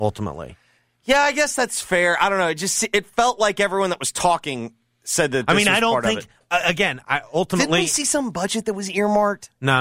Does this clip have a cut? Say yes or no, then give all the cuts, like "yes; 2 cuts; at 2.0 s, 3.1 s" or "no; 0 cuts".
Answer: no; 0 cuts